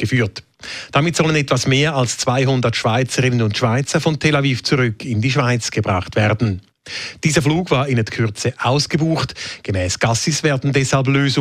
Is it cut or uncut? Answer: uncut